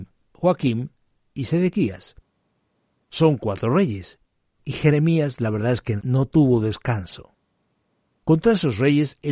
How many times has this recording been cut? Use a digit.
0